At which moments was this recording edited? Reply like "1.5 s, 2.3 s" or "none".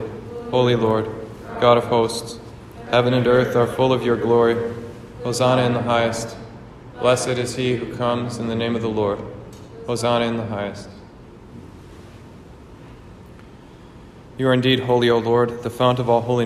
none